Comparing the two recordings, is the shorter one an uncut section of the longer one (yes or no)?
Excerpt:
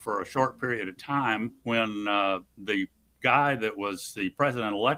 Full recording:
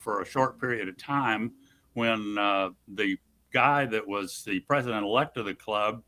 no